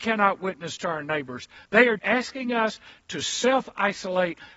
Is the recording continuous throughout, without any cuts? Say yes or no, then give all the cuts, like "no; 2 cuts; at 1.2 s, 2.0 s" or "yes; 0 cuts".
no; 1 cut; at 2.0 s